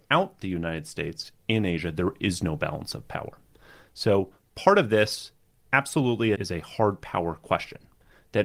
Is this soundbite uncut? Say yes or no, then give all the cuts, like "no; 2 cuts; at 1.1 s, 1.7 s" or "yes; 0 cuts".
no; 1 cut; at 6.3 s